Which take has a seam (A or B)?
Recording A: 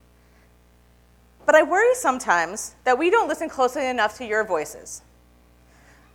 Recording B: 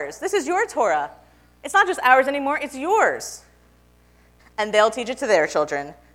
B